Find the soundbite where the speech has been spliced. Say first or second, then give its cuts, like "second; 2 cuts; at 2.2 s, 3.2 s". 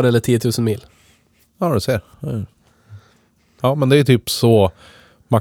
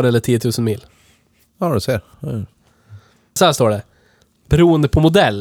second; 1 cut; at 3.4 s